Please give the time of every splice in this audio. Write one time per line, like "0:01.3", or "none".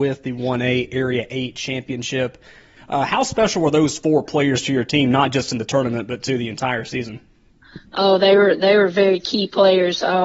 0:02.8